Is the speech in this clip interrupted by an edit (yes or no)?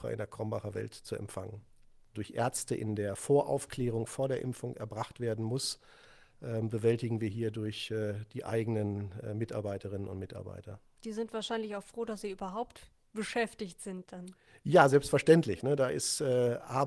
yes